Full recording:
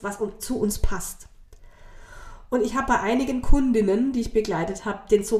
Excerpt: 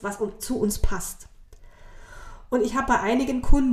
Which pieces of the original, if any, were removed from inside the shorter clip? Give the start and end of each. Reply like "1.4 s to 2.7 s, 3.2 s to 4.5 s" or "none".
none